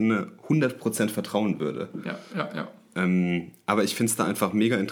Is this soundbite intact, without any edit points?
yes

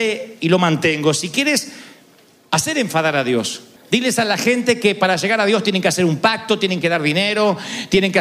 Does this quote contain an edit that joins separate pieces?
yes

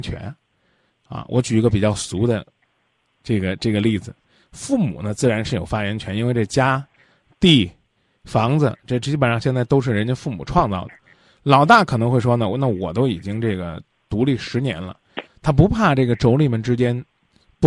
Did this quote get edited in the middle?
yes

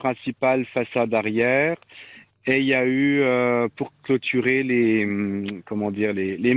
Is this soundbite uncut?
yes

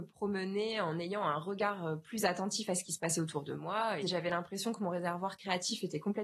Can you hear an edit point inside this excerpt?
yes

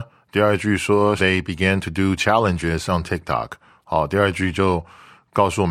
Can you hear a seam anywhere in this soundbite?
yes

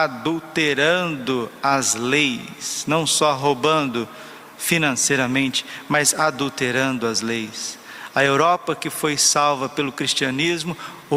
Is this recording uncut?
yes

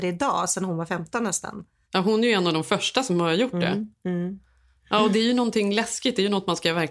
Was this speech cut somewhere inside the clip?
no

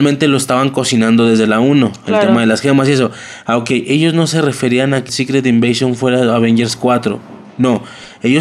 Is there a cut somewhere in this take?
yes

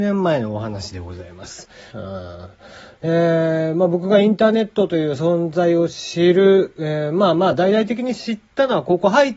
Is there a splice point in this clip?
yes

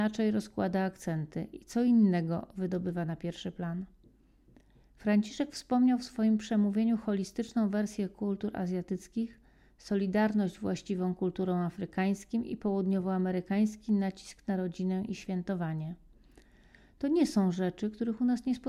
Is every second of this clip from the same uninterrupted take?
yes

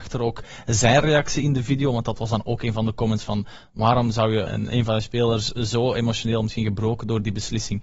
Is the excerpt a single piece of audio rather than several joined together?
no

